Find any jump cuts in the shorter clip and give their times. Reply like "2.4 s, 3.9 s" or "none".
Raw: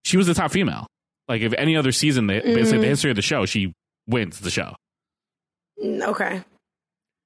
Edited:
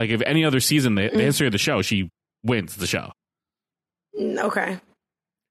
1.2 s

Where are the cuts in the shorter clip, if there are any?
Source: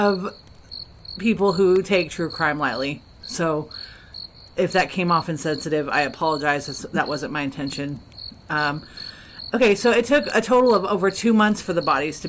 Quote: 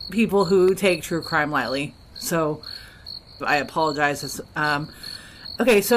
3.4 s, 4.4 s

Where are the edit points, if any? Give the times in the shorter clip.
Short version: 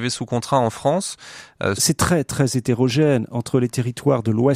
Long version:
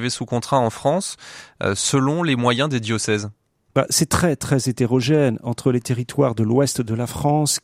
1.8 s

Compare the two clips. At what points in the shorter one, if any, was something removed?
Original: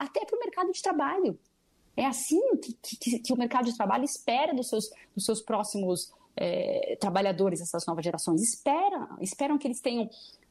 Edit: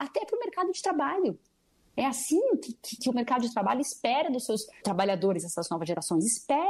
3.0 s, 4.8 s

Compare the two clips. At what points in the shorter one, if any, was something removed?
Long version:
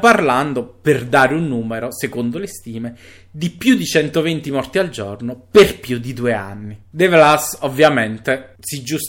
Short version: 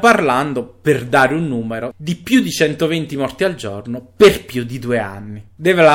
1.9 s

